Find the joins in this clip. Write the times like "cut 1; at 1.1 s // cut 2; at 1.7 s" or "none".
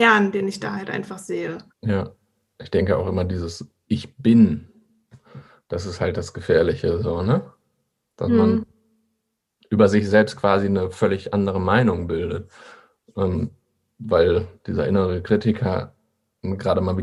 cut 1; at 1.7 s